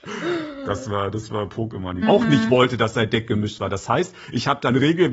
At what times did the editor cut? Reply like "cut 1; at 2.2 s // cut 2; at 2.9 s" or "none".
cut 1; at 2.0 s